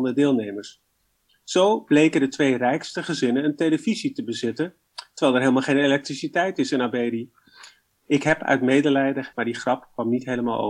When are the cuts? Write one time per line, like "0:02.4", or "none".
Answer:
0:09.3

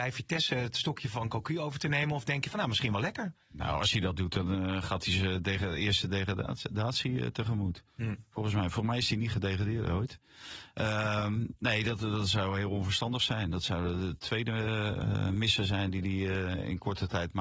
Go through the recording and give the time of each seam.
none

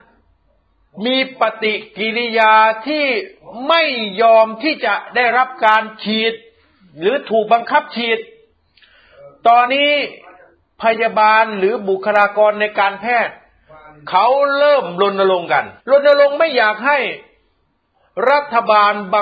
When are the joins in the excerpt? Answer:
0:09.7
0:15.8

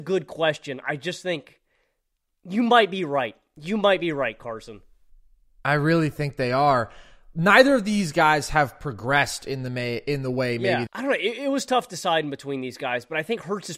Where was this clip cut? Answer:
0:10.9

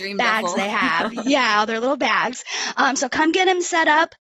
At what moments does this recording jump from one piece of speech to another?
none

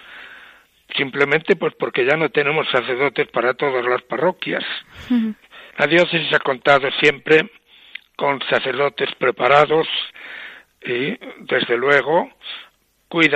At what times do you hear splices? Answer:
0:05.7

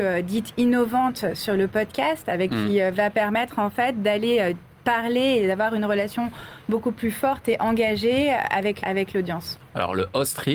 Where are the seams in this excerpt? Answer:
0:02.5
0:08.8

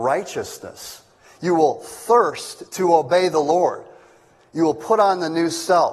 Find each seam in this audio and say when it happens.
none

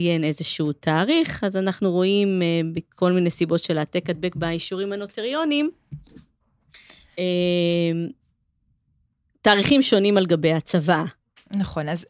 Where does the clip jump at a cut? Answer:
none

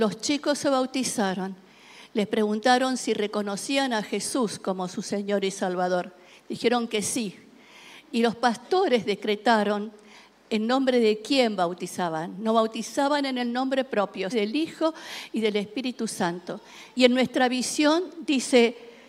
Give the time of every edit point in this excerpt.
0:14.3
0:16.9

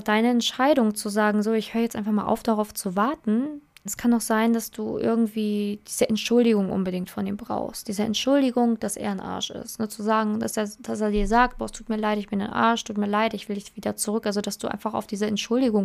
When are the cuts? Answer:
0:03.9

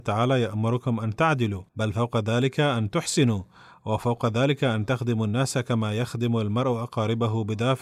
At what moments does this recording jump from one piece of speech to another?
0:01.7

